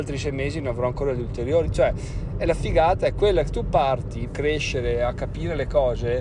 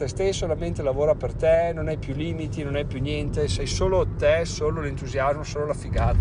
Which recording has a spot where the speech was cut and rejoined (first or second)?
first